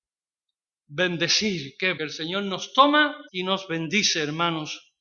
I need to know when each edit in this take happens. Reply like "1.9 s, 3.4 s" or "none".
2.0 s, 3.3 s